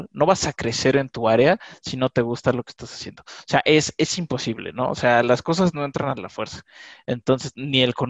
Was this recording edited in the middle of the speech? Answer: no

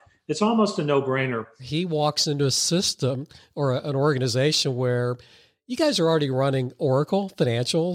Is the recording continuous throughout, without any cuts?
no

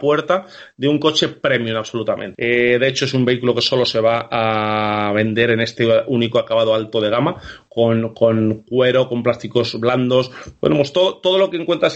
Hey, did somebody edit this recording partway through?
yes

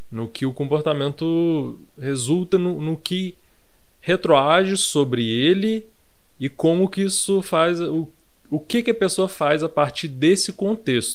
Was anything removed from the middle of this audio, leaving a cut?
no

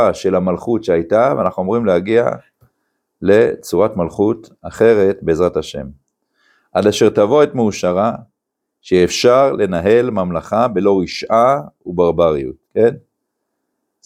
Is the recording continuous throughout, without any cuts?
no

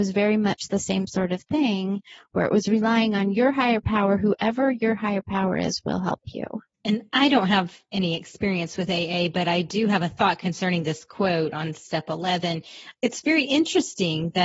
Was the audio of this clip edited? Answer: yes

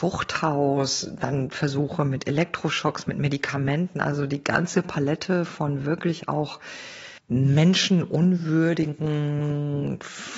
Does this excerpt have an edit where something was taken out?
yes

